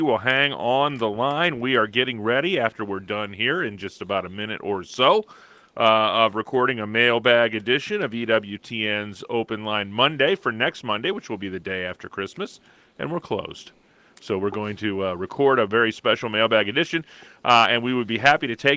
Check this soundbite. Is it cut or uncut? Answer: uncut